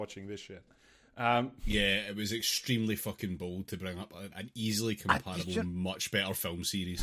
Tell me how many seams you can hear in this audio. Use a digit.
1